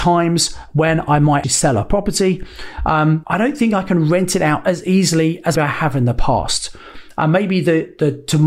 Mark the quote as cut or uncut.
cut